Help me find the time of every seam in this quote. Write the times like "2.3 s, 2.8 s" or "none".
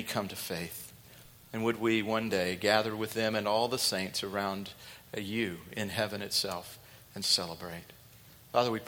none